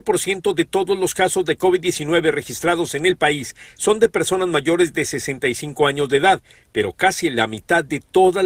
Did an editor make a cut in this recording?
no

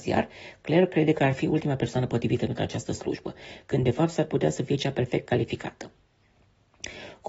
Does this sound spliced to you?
no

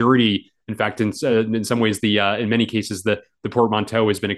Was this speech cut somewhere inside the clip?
no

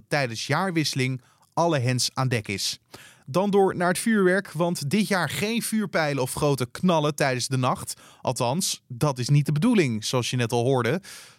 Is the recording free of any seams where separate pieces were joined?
yes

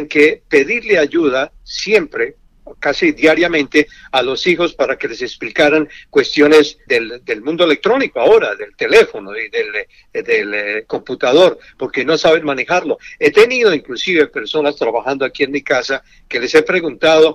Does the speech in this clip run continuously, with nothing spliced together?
no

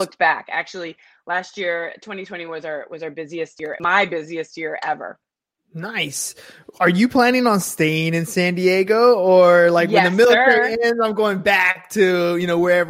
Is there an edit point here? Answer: no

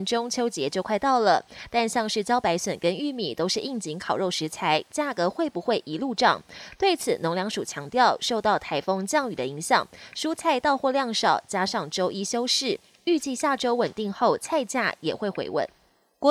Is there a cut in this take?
no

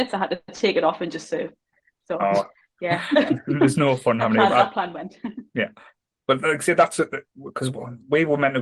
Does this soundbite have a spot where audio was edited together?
no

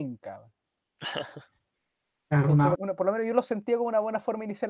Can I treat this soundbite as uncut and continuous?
no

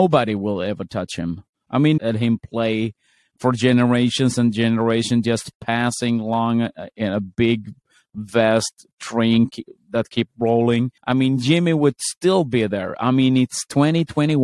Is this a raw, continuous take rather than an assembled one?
no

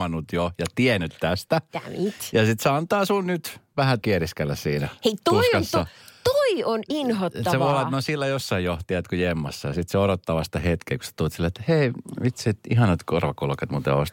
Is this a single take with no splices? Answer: no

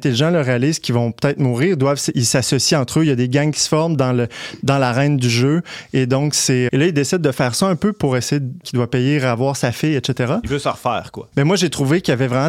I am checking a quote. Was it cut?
yes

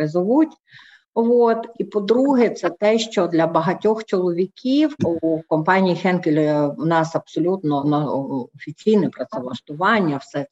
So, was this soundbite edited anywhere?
yes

